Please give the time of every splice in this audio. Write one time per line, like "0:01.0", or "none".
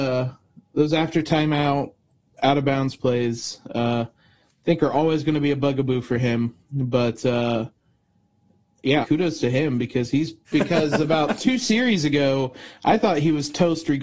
0:09.0
0:10.5